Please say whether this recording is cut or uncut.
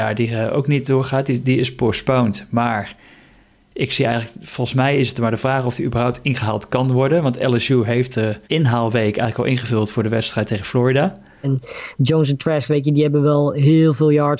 cut